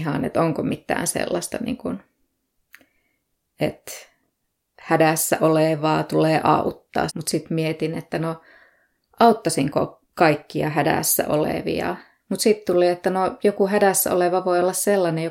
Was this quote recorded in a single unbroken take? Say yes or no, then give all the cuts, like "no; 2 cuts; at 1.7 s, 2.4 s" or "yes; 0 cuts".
no; 2 cuts; at 7.1 s, 12.2 s